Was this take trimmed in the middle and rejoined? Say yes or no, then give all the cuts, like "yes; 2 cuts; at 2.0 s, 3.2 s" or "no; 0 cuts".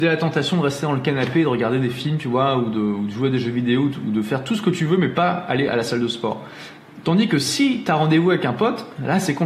no; 0 cuts